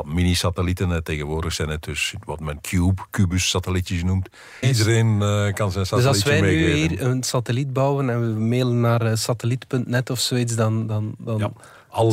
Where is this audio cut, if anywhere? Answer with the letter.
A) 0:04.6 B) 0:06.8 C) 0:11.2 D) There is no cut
A